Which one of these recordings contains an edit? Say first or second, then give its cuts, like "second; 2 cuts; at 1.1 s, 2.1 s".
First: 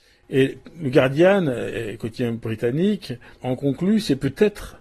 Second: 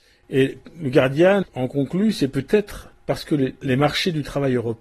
second; 2 cuts; at 1.4 s, 3.0 s